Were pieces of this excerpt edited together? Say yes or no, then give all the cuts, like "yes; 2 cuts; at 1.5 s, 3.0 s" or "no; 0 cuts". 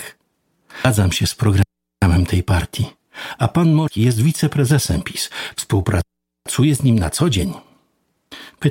no; 0 cuts